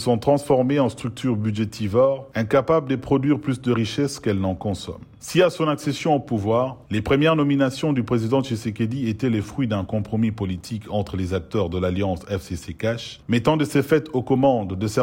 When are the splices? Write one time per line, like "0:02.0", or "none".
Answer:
0:05.2